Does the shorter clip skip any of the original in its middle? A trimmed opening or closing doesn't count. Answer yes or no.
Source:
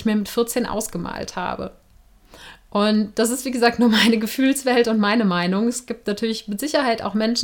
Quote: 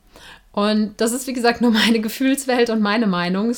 no